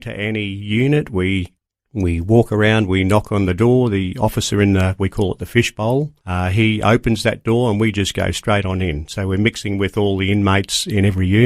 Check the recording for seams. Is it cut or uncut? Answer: cut